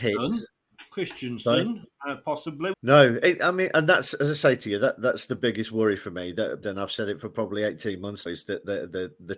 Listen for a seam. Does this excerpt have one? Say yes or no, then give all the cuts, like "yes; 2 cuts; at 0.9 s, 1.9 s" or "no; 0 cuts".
yes; 3 cuts; at 2.7 s, 6.6 s, 8.3 s